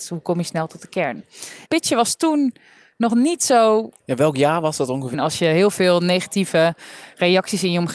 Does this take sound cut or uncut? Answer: cut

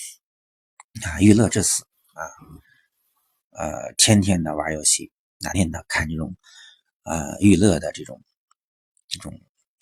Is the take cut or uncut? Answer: cut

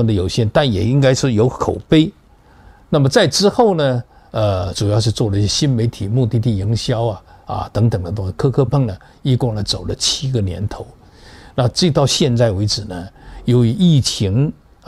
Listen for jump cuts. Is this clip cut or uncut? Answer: cut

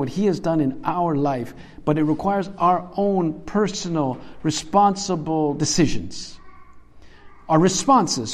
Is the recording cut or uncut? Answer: uncut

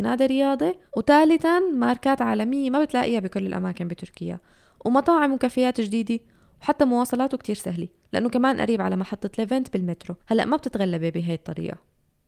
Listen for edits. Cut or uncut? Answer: cut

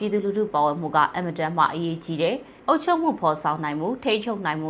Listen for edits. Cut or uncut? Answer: cut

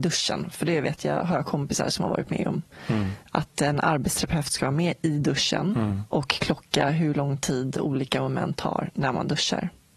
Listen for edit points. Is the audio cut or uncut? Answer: uncut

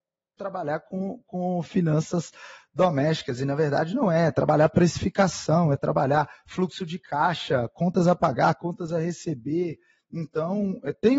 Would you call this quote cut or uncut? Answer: uncut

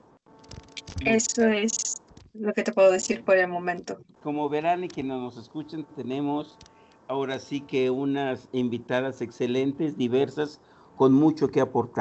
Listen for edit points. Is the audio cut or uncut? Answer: cut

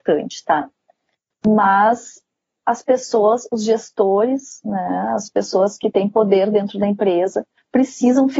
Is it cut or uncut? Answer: cut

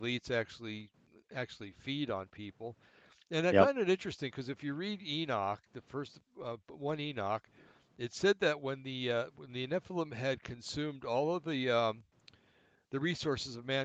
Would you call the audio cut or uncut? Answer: uncut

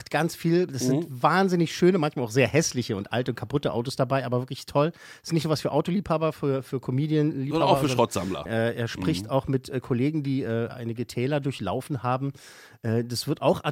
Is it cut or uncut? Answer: cut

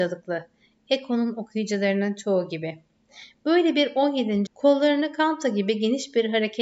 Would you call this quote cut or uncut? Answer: cut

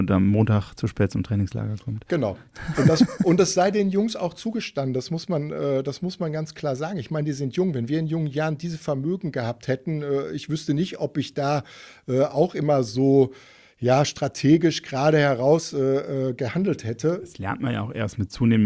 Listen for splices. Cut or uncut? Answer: uncut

